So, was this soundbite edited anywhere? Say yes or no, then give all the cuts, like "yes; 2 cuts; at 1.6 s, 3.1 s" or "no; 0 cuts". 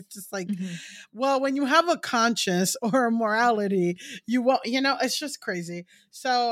no; 0 cuts